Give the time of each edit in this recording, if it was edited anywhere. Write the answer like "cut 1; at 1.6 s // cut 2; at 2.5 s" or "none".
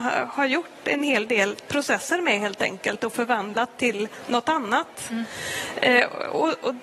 none